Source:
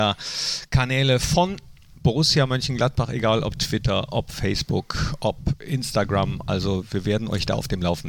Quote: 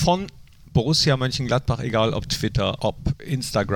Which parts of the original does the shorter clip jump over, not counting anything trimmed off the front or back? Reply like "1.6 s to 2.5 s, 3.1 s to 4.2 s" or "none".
4.1 s to 5.2 s